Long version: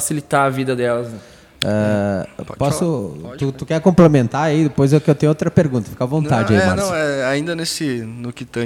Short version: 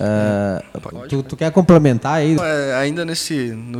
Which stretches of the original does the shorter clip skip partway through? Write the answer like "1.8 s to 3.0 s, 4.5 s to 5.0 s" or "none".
2.6 s to 3.2 s, 4.7 s to 6.9 s

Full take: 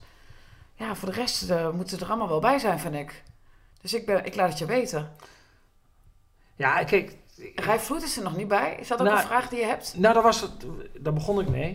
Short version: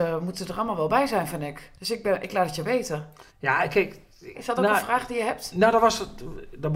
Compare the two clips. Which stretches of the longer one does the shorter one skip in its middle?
3.3 s to 3.8 s, 5.3 s to 6.5 s, 7.5 s to 8.8 s

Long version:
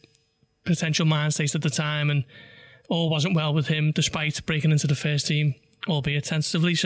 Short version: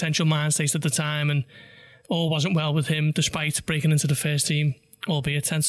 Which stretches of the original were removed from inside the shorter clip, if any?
none

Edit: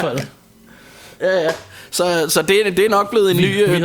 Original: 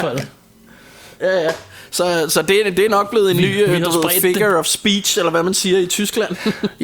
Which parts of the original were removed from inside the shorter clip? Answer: none

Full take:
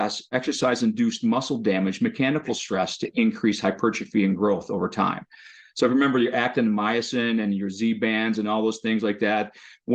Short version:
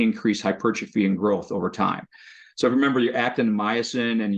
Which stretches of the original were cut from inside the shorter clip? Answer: none

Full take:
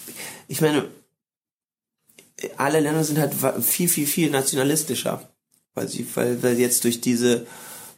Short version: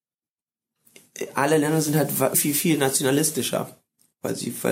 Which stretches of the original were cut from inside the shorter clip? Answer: 3.6 s to 3.9 s

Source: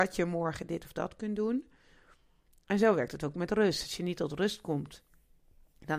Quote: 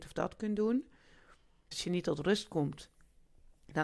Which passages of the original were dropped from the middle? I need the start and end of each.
2.5 s to 3.8 s

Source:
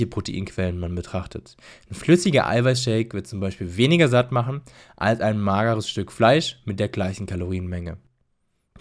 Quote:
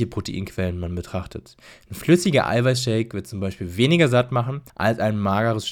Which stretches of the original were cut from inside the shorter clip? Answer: 4.7 s to 4.9 s

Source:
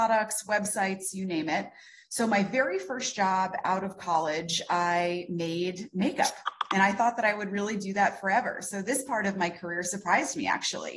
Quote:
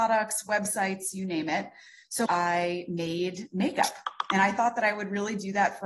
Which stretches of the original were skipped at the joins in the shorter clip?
2.3 s to 4.7 s

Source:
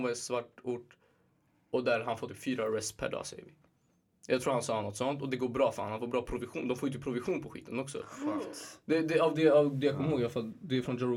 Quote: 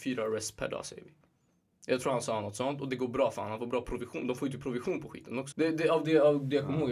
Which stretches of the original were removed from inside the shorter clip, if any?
7.9 s to 8.8 s

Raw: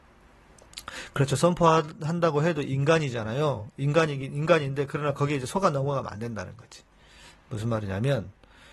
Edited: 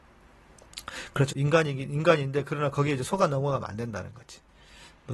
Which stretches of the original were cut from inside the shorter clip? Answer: 1.3 s to 3.7 s

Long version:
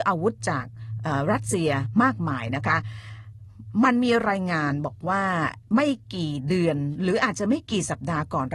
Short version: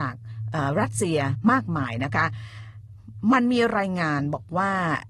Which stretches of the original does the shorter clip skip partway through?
none

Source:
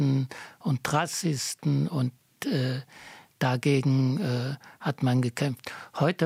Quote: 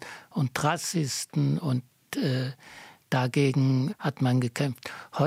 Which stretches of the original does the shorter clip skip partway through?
4.2 s to 4.7 s

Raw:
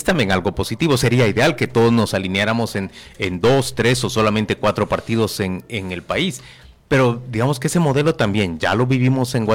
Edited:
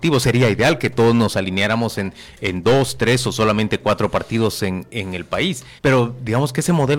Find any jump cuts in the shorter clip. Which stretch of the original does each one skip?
6.5 s to 6.8 s

